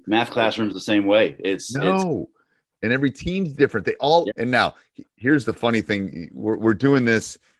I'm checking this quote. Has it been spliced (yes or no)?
yes